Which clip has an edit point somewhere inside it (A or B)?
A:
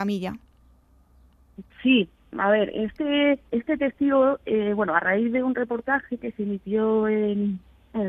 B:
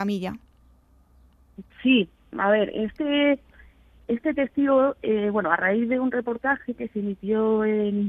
A